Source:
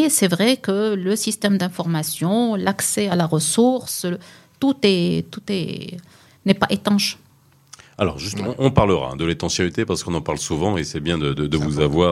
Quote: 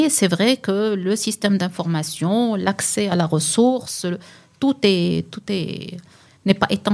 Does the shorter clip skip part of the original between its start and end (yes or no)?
no